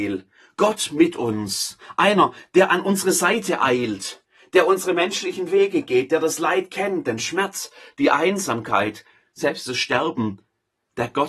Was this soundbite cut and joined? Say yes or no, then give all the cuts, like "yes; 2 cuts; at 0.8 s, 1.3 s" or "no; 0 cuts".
no; 0 cuts